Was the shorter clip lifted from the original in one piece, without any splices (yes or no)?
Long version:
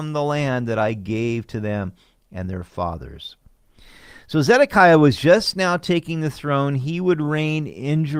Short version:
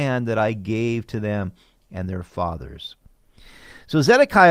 yes